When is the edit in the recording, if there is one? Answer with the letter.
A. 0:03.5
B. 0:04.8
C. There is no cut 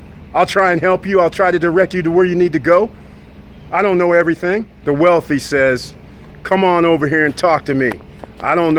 B